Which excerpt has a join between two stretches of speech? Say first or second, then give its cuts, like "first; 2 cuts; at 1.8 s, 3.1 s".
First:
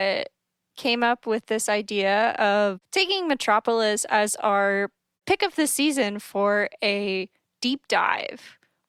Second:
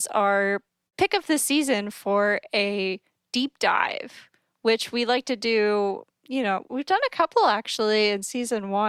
second; 1 cut; at 6.6 s